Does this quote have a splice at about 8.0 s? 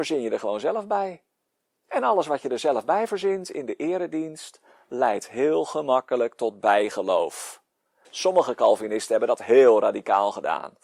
yes; 1 cut; at 8.0 s

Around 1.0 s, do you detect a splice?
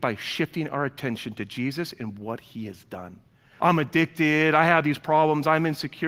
no; 1 cut; at 3.6 s

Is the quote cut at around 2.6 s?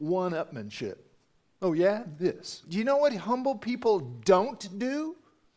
yes; 1 cut; at 2.6 s

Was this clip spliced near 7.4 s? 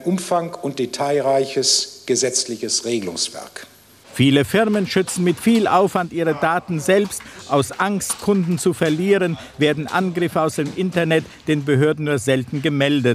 no; 0 cuts

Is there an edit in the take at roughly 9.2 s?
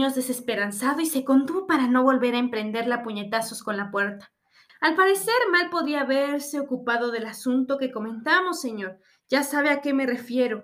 no; 1 cut; at 4.7 s

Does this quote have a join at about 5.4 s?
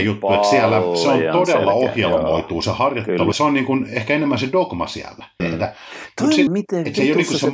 yes; 3 cuts; at 3.3 s, 5.4 s, 6.5 s

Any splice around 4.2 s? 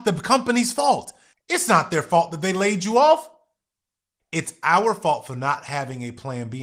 yes; 2 cuts; at 1.3 s, 4.2 s

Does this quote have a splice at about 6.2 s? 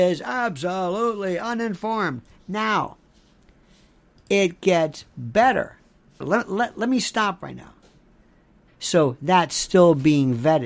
yes; 2 cuts; at 6.2 s, 8.7 s

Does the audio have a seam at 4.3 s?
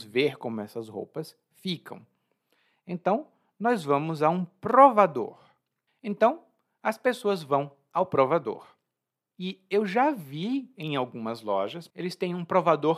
no; 3 cuts; at 5.9 s, 9.3 s, 11.9 s

